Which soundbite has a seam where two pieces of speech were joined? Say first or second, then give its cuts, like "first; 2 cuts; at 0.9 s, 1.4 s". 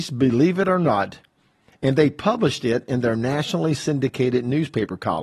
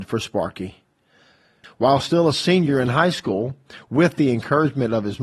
second; 1 cut; at 1.6 s